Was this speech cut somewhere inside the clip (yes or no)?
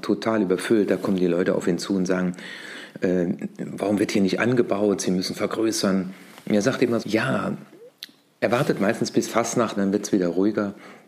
yes